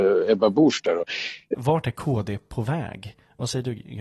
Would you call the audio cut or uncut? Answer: cut